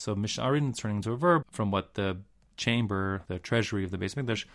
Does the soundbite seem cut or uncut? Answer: cut